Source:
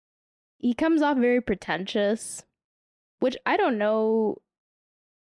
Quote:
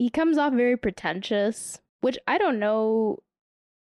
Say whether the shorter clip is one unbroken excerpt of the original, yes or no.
no